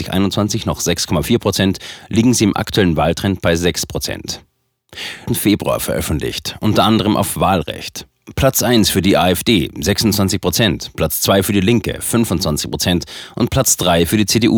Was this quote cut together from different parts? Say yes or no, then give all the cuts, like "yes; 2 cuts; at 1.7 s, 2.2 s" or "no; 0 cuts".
yes; 1 cut; at 5.3 s